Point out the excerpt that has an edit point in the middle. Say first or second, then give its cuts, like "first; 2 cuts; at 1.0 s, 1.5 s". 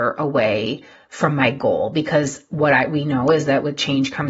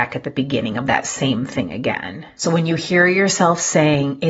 second; 1 cut; at 2.4 s